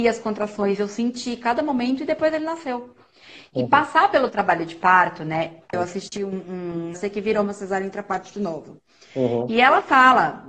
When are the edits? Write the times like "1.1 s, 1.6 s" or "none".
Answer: 5.7 s, 6.9 s